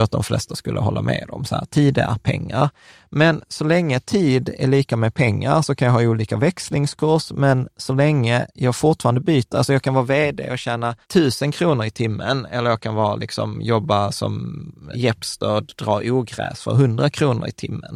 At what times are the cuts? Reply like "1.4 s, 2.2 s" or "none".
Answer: 11.0 s, 14.9 s

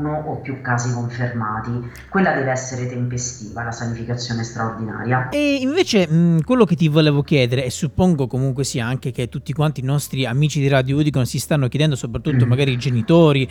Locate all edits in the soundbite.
5.3 s

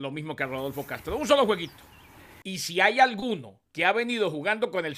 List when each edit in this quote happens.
2.4 s, 3.7 s

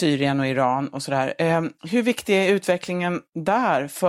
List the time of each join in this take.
1.8 s

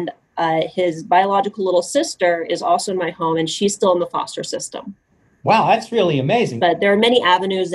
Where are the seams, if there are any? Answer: 6.6 s

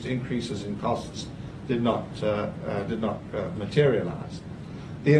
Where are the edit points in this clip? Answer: none

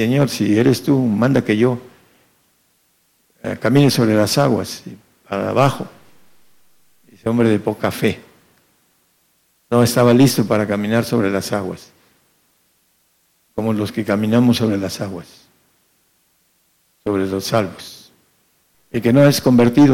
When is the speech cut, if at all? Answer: 18.7 s

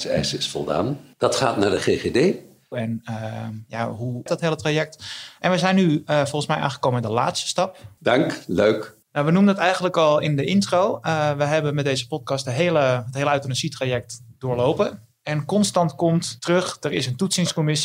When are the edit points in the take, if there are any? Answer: 2.7 s, 4.3 s, 8.0 s

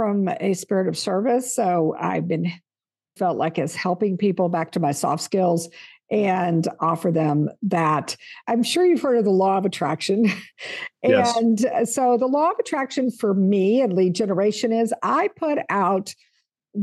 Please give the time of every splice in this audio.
3.2 s, 8.4 s

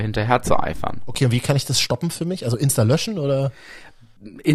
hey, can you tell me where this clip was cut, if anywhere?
none

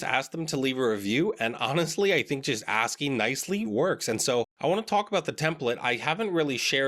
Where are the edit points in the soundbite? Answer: 3.6 s

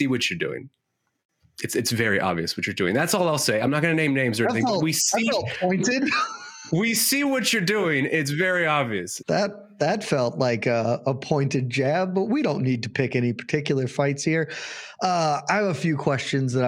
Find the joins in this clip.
9.2 s

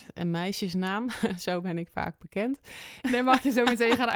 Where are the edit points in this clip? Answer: 3.0 s

